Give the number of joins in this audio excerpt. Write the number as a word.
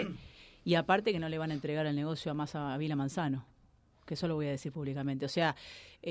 zero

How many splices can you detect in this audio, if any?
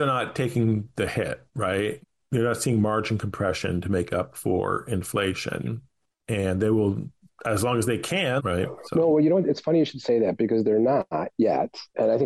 one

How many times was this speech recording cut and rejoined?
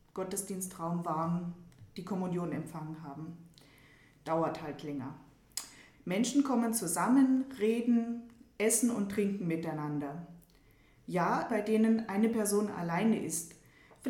two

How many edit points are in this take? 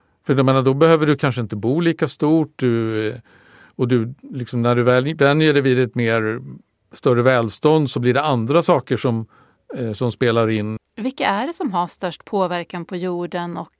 one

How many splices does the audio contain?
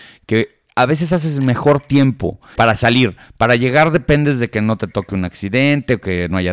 one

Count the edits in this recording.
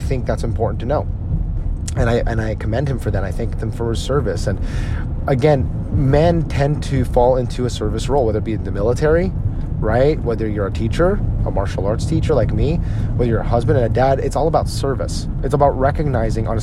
zero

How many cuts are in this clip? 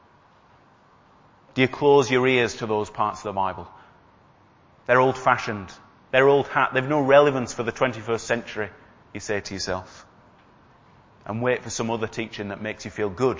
zero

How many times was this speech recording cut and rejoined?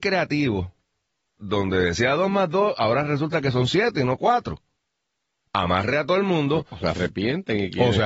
one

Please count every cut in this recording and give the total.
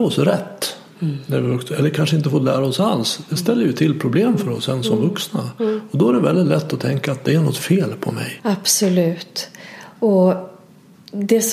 one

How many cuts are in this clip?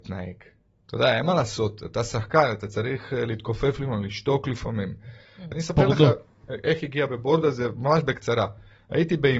one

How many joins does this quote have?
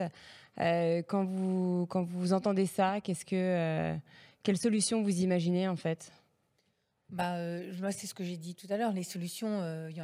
zero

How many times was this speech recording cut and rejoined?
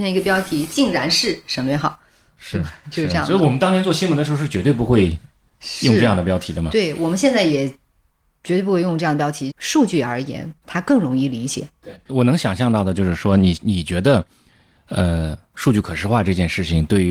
three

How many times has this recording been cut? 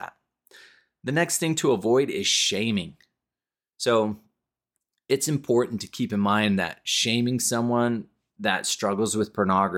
one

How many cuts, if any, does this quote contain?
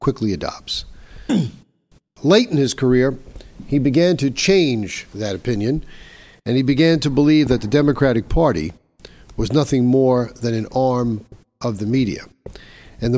one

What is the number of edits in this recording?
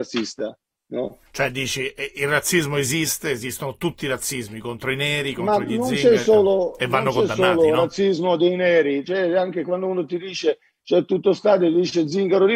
one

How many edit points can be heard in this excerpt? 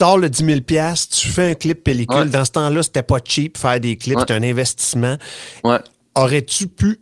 zero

